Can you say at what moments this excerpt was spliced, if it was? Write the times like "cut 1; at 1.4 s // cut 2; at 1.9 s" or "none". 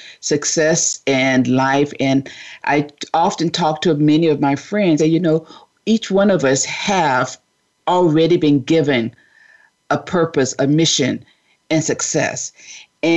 cut 1; at 5.0 s